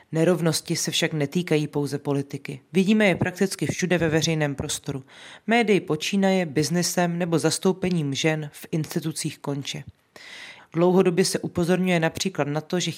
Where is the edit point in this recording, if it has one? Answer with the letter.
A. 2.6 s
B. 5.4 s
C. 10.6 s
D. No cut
C